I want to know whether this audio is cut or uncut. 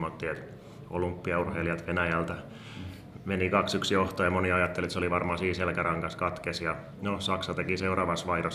uncut